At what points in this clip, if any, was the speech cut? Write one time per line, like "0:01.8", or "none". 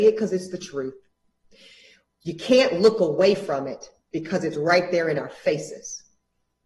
none